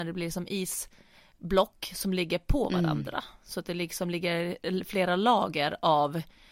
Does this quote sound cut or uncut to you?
uncut